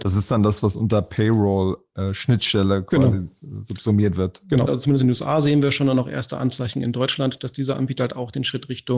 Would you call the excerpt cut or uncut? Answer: cut